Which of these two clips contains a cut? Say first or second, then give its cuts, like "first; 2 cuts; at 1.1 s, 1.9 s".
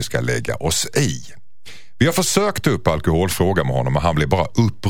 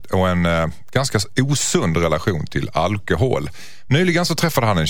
second; 1 cut; at 3.9 s